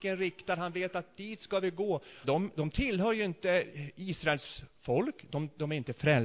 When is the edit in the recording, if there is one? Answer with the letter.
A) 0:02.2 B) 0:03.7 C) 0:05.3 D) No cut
A